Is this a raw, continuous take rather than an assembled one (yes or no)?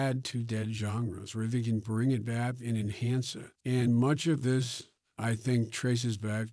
yes